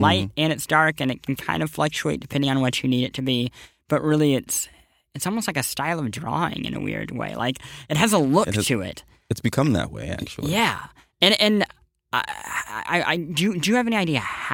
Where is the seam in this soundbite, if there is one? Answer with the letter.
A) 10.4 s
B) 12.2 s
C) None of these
C